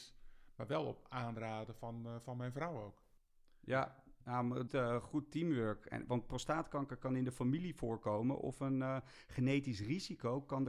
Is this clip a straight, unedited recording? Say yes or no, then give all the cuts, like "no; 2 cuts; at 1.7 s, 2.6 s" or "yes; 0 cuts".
no; 1 cut; at 4.7 s